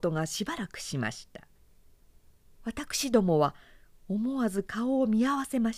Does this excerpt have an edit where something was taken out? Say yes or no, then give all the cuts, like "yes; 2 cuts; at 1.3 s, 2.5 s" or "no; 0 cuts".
no; 0 cuts